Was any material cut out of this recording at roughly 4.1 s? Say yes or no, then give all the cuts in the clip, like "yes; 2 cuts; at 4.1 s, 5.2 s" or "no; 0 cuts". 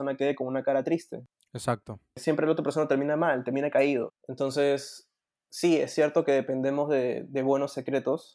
yes; 1 cut; at 4.1 s